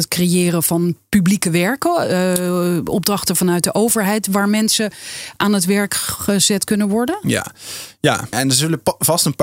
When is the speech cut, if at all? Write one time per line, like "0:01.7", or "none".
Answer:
0:08.3